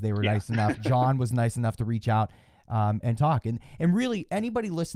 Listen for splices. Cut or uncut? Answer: cut